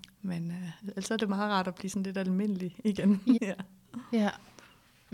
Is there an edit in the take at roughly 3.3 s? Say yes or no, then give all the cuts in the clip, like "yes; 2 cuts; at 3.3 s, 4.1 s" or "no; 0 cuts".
yes; 1 cut; at 3.3 s